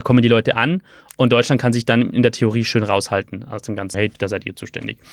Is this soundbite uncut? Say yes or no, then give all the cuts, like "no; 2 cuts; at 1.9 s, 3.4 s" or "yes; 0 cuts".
no; 1 cut; at 3.9 s